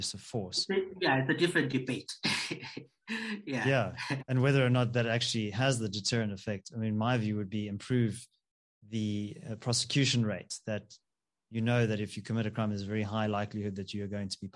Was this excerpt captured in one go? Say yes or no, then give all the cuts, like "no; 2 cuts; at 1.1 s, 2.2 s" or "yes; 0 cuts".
yes; 0 cuts